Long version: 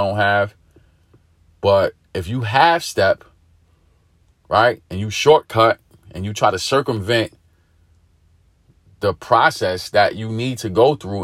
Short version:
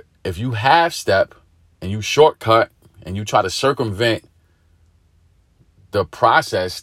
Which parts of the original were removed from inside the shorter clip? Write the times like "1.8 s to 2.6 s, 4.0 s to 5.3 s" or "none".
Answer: 3.7 s to 4.9 s